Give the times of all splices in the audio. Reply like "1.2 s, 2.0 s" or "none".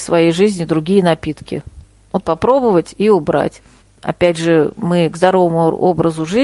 2.2 s, 3.8 s